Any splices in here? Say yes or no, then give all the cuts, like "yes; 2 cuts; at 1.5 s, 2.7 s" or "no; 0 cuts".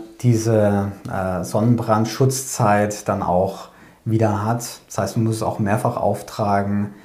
no; 0 cuts